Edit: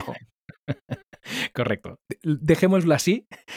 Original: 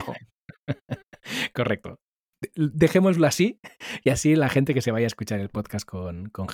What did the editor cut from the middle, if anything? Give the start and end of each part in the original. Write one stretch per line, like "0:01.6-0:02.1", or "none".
0:02.1-0:02.4